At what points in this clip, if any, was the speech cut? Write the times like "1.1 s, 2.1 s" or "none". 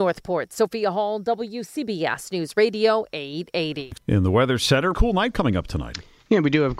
4.9 s